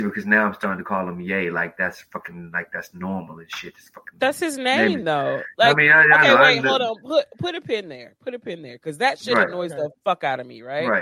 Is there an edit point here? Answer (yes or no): no